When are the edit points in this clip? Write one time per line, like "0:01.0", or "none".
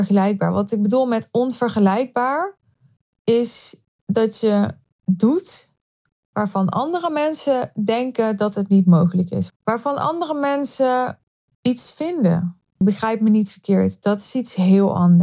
0:09.5
0:12.8